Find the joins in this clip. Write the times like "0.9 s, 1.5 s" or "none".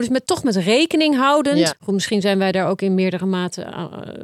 1.7 s